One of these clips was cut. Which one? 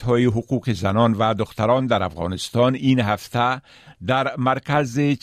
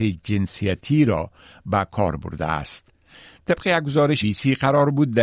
second; 1 cut; at 4.2 s

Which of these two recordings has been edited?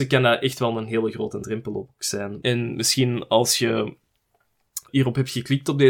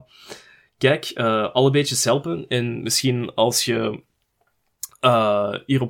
first; 2 cuts; at 2.4 s, 4.9 s

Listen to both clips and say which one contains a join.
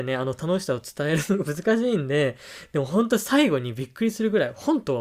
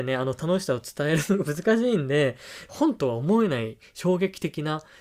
second; 1 cut; at 2.7 s

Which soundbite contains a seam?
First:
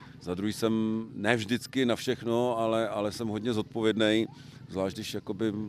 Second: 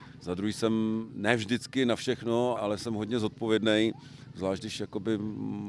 second; 1 cut; at 2.6 s

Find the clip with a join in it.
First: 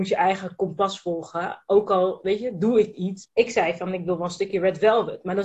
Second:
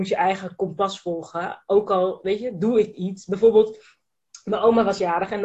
first; 1 cut; at 3.2 s

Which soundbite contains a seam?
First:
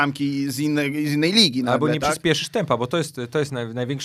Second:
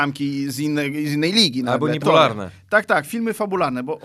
second; 1 cut; at 2.0 s

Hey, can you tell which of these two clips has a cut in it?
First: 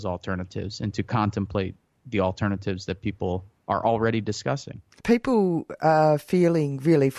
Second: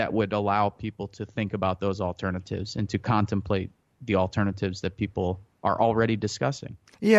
first; 1 cut; at 5.0 s

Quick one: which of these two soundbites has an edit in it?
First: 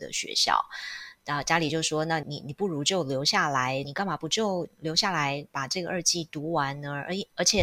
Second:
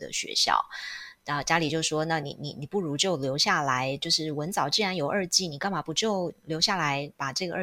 first; 2 cuts; at 2.2 s, 3.8 s

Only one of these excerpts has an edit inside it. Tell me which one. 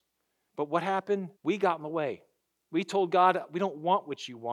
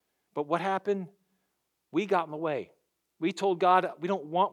first; 1 cut; at 1.4 s

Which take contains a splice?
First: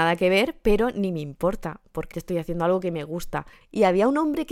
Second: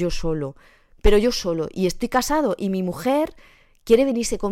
first; 2 cuts; at 2.1 s, 3.6 s

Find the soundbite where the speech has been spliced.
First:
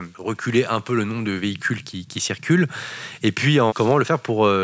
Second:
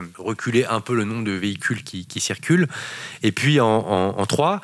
first; 1 cut; at 3.7 s

